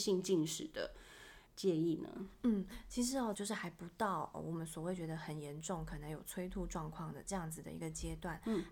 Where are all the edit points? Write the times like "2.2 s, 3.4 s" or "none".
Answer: 1.5 s, 3.3 s

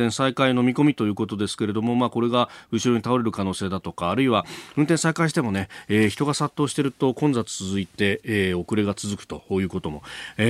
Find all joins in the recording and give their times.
none

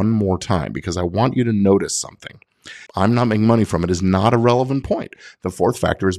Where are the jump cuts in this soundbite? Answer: 2.9 s

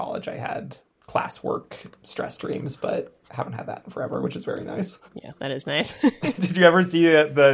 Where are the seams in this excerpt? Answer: 5.1 s, 6.4 s

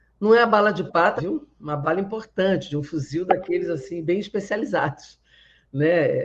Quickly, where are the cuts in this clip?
1.2 s

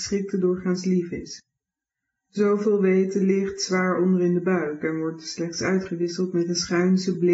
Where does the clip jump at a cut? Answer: none

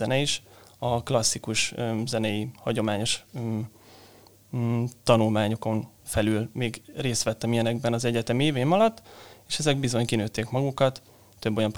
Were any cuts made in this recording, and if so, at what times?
6.9 s

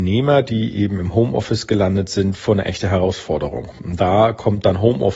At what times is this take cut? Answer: none

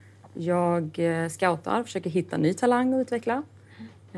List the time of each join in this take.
none

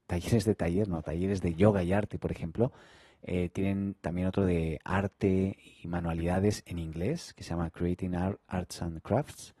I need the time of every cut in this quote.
none

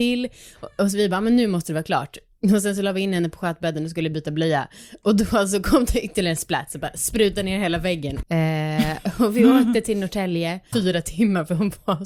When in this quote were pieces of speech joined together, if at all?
8.2 s, 10.7 s

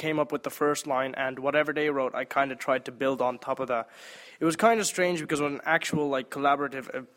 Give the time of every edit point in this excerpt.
none

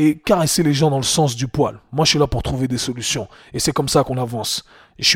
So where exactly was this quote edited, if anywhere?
none

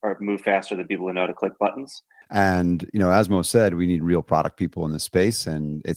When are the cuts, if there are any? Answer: 2.2 s

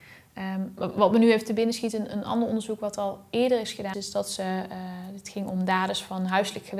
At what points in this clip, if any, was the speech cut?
3.9 s

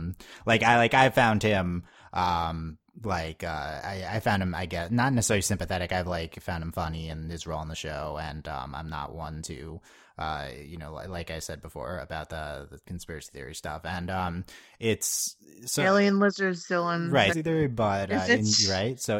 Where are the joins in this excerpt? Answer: 17.3 s

